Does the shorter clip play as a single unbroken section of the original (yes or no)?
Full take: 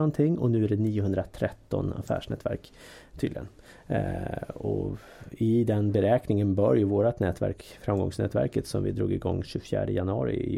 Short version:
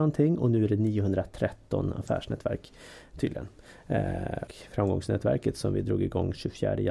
no